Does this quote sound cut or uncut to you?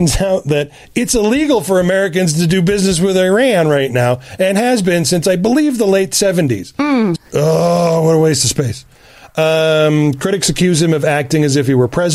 cut